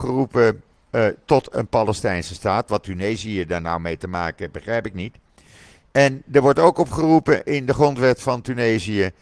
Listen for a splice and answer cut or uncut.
uncut